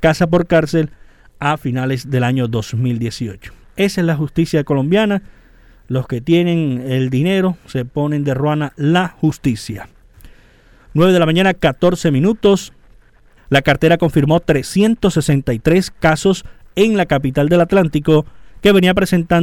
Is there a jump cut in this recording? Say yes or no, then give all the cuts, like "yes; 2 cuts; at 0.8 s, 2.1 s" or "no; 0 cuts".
yes; 1 cut; at 13.4 s